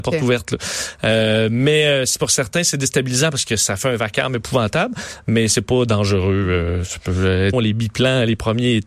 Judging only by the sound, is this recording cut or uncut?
cut